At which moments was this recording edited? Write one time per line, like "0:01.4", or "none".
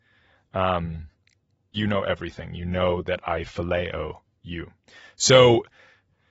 0:01.7